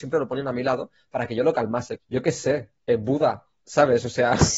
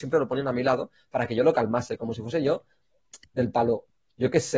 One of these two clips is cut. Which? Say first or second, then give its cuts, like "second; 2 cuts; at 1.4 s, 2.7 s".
first; 1 cut; at 2.0 s